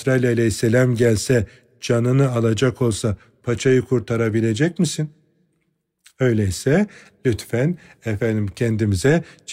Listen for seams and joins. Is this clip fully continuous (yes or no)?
yes